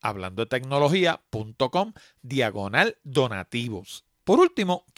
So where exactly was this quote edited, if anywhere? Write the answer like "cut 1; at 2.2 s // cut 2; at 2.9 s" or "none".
cut 1; at 4.1 s